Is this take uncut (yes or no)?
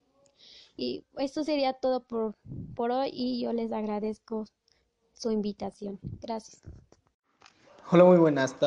yes